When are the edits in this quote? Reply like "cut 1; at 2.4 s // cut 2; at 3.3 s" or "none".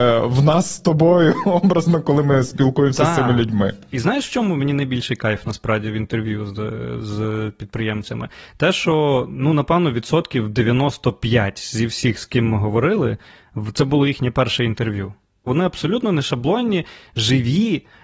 none